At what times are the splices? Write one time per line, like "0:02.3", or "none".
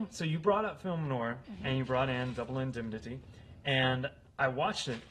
0:01.4